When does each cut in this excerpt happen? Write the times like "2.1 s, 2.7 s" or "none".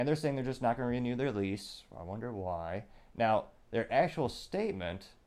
none